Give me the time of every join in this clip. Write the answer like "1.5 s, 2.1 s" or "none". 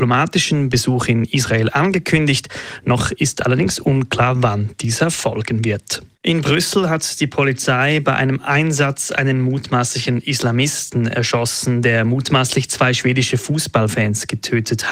6.1 s